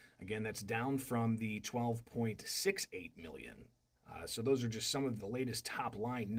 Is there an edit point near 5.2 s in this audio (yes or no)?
yes